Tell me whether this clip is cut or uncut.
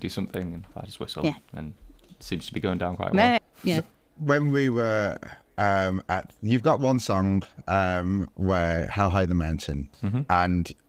cut